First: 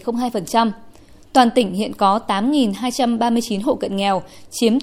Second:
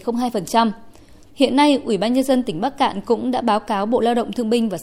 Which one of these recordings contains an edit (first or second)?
second